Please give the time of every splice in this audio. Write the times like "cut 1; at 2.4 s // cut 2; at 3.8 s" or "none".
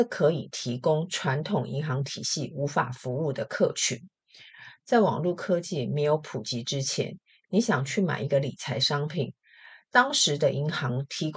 none